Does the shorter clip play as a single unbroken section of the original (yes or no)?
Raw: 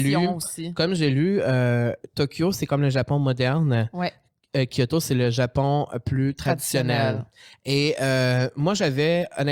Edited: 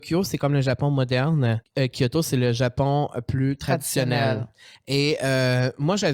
no